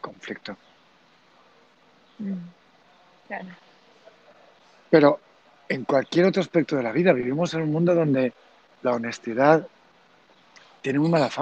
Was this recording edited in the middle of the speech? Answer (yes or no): no